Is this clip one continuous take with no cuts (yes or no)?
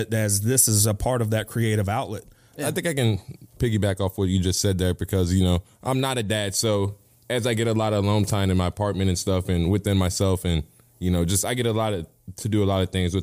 yes